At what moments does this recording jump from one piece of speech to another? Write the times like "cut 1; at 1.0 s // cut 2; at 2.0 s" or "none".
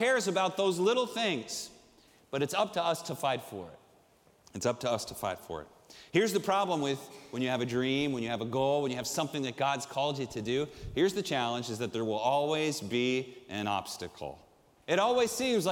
cut 1; at 14.8 s